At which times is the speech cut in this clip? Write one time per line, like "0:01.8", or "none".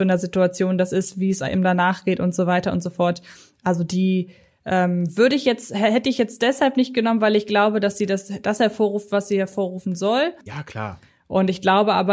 0:10.5